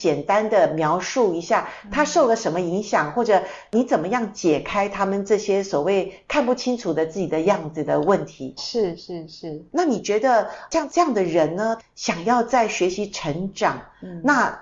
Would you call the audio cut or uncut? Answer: cut